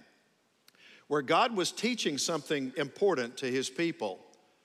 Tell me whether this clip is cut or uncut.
cut